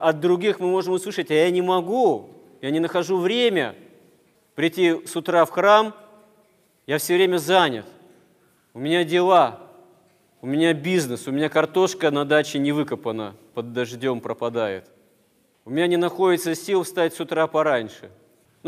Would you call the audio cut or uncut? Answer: uncut